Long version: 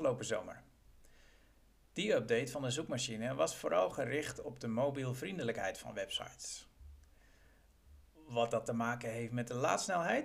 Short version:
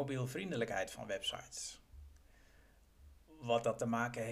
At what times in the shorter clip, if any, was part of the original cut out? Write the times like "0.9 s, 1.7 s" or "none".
none